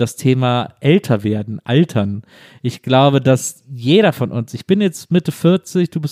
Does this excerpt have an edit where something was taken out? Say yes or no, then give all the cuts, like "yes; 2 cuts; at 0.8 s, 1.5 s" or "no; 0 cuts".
no; 0 cuts